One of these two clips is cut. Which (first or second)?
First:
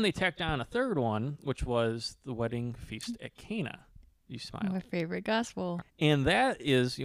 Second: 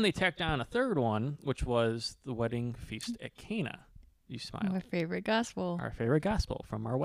first